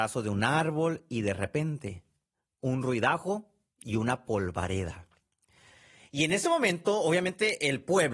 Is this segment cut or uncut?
uncut